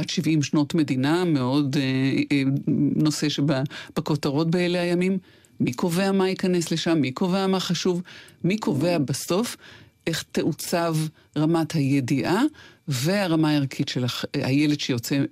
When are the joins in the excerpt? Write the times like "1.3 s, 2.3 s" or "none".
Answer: none